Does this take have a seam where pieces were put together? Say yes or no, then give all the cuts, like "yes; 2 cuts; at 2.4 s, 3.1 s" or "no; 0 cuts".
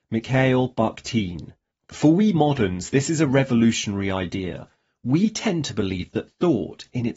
yes; 1 cut; at 1.7 s